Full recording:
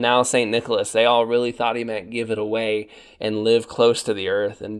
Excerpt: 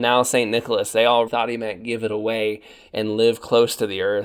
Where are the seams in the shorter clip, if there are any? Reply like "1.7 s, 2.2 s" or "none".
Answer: 1.3 s